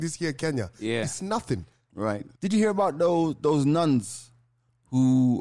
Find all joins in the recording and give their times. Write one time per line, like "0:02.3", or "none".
0:02.3